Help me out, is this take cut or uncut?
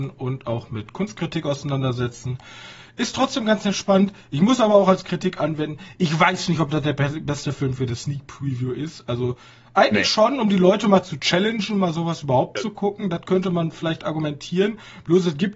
uncut